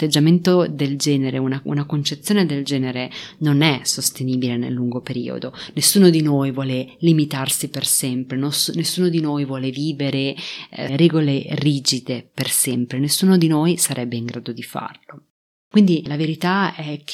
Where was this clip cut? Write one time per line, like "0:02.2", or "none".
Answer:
0:10.9

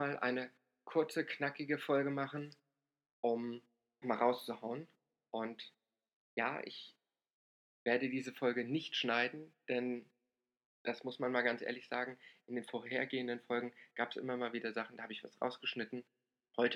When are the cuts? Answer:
0:04.0

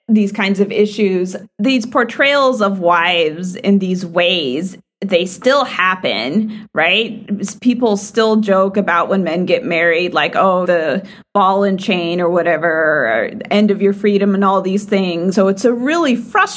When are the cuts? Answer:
0:10.6
0:15.3

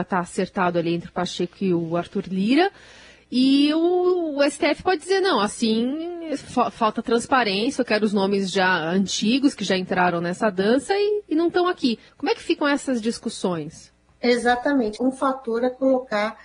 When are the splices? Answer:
0:12.1
0:15.0

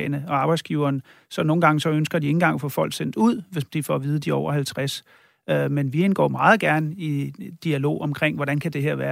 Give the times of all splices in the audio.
none

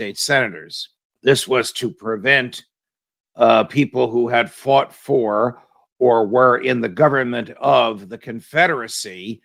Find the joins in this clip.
0:01.1

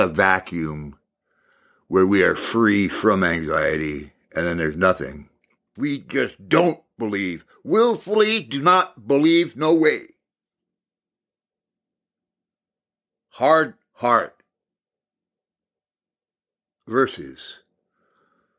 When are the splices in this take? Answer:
0:05.8

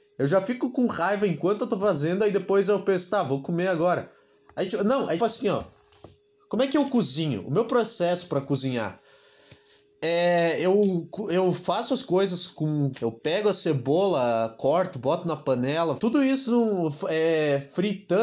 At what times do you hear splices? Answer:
0:05.2
0:12.9
0:16.0

